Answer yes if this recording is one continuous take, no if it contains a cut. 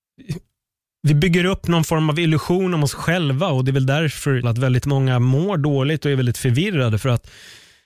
no